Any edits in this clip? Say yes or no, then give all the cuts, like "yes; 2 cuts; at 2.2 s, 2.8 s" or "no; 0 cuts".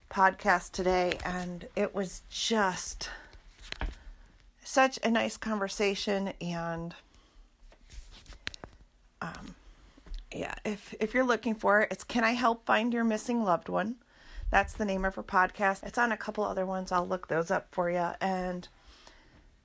yes; 1 cut; at 15.8 s